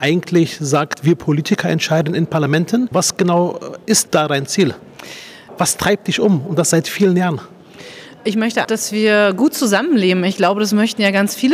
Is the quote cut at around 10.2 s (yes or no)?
no